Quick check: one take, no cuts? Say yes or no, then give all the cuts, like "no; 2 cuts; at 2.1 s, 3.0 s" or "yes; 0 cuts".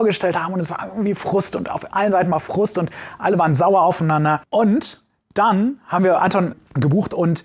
yes; 0 cuts